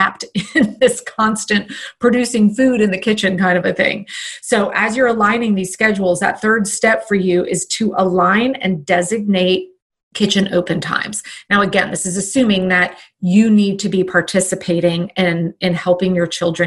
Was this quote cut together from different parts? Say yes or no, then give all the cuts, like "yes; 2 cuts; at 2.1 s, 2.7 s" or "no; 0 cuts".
no; 0 cuts